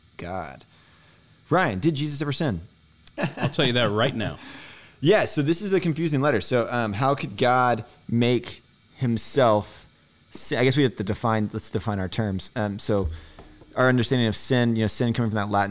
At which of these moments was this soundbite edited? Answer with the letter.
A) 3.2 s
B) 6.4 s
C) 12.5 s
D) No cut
A